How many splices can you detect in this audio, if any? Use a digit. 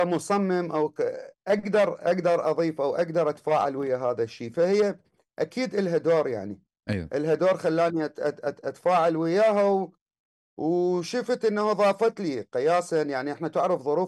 0